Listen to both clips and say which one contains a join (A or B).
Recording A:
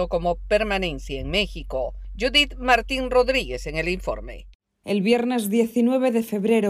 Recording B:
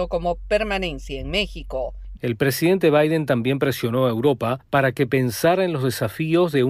B